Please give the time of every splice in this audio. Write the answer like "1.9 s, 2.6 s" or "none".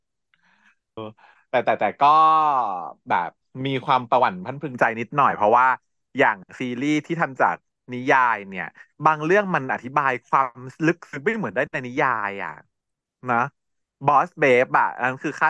1.0 s